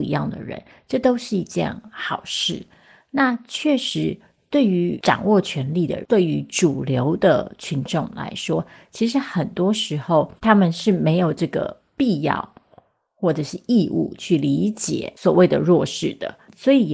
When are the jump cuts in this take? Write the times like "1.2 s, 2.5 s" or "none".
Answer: 10.4 s